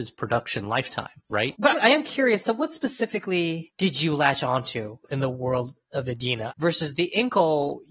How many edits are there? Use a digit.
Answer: 2